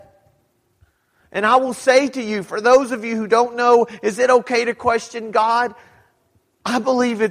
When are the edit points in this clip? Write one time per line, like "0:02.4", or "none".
none